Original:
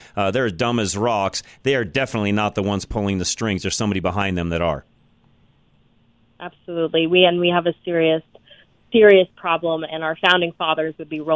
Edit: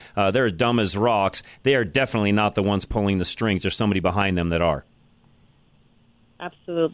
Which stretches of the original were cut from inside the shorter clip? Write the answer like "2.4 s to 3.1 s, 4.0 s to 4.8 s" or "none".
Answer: none